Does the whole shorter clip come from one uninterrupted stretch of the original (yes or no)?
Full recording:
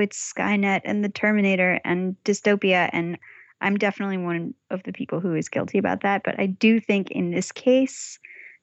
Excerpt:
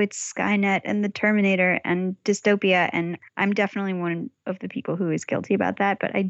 no